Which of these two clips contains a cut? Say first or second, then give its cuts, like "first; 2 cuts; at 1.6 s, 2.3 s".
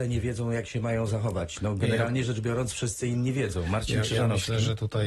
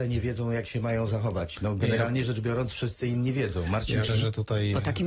second; 1 cut; at 4.1 s